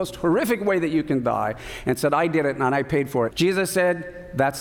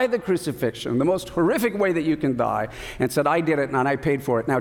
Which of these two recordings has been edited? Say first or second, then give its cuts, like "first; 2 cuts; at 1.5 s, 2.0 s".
first; 1 cut; at 3.3 s